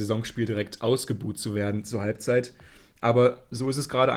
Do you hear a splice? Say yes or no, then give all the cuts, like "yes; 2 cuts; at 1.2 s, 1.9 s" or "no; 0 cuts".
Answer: no; 0 cuts